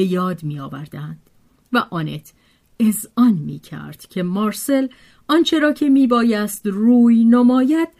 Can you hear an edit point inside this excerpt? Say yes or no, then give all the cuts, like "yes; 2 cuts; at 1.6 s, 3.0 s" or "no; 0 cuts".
no; 0 cuts